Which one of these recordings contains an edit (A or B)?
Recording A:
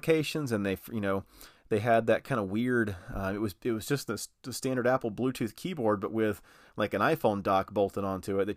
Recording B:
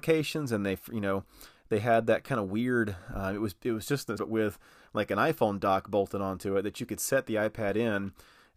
B